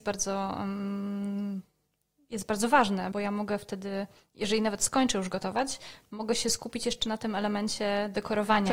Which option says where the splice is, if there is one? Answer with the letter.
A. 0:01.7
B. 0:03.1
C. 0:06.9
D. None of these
B